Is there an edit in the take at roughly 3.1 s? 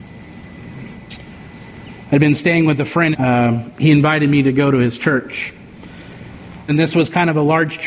yes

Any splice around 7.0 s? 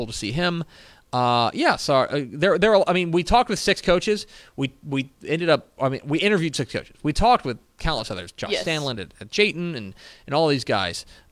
no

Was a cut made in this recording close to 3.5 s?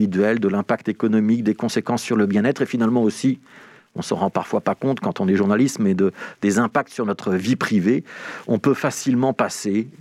no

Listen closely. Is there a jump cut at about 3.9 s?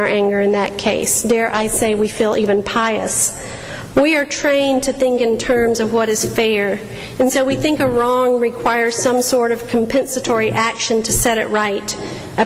yes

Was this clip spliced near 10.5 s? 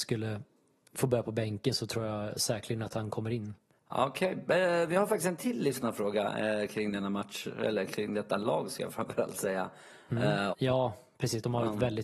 yes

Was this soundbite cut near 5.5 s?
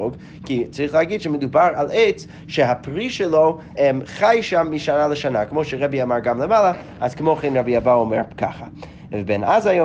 no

